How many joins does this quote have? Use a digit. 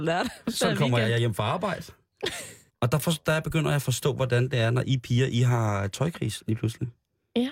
1